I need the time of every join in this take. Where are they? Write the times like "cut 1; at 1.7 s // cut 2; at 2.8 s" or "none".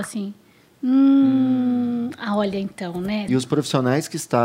cut 1; at 3.3 s

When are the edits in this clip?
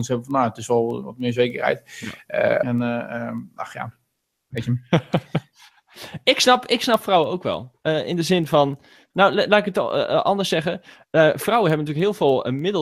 cut 1; at 2.6 s

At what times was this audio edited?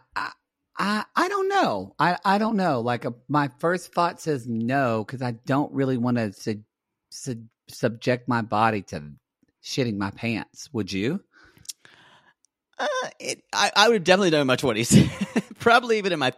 none

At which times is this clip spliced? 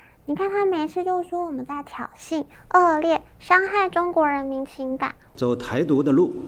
none

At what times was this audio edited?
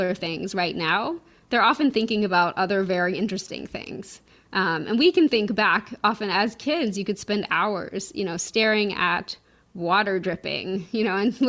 none

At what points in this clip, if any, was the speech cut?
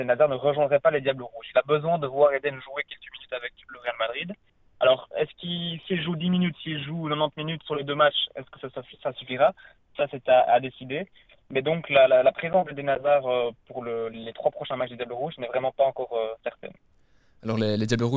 none

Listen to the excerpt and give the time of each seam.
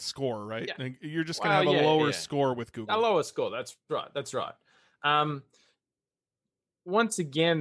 none

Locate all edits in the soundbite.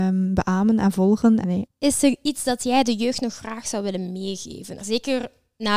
cut 1; at 1.4 s // cut 2; at 4.8 s

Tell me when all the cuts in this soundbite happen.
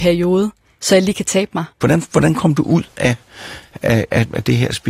cut 1; at 1.8 s

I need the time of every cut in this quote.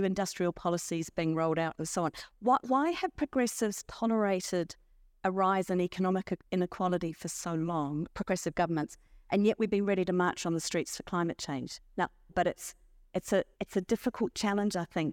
cut 1; at 12.3 s // cut 2; at 13.5 s

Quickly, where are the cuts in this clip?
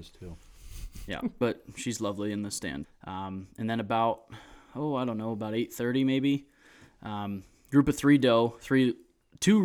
cut 1; at 1.4 s // cut 2; at 2.8 s

